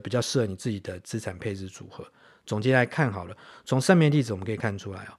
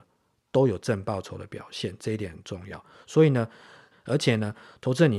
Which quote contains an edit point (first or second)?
second